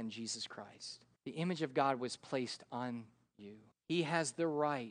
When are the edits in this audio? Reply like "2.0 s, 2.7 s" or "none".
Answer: 1.2 s, 3.7 s